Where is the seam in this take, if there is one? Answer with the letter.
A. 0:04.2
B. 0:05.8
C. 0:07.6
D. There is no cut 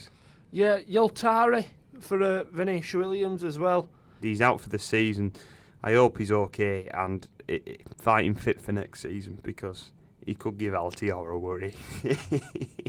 A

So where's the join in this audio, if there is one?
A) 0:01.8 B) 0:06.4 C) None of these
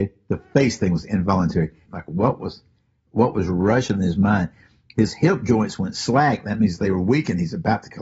A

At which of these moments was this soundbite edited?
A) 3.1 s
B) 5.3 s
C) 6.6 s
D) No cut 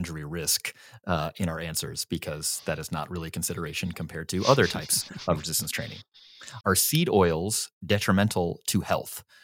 C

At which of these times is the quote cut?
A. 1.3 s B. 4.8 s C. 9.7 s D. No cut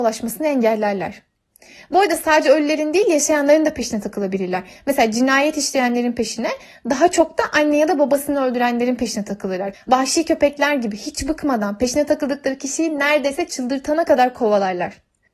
C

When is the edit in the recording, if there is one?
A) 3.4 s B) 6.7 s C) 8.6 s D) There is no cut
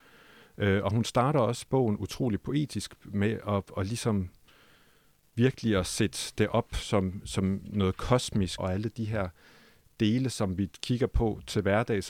C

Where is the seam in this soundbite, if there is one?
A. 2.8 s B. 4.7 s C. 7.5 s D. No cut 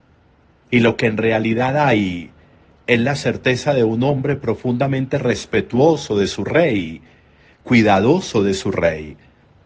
D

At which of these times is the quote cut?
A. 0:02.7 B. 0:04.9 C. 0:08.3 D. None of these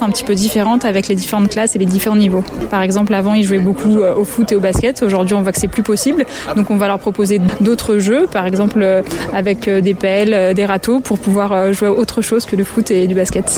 D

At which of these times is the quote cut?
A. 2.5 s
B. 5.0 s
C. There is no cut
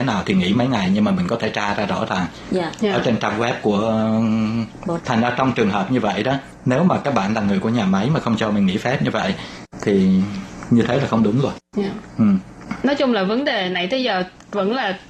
B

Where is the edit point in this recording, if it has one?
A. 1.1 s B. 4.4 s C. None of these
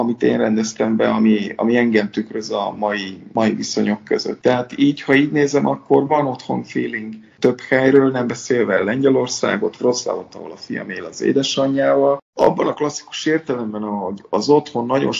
B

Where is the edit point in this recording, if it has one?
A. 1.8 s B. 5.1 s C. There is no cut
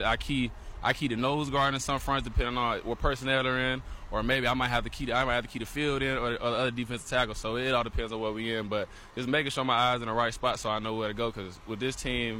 C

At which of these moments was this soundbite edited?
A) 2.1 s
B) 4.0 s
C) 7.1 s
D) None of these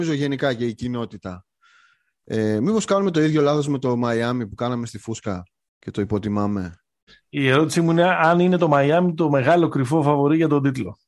C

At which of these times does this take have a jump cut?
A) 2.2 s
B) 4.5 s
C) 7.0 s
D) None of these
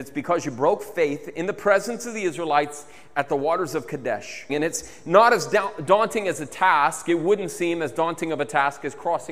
B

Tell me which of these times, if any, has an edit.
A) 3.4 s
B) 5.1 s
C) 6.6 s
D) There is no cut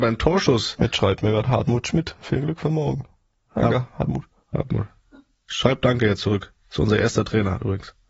D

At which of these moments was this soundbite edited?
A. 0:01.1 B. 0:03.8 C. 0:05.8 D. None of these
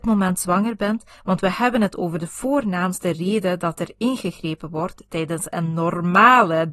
A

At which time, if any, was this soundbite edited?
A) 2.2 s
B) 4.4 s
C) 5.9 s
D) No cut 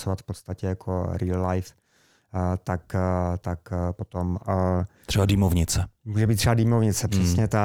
B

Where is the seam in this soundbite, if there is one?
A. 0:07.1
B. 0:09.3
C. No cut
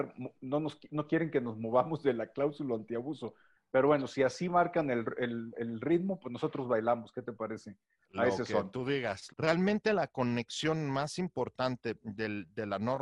B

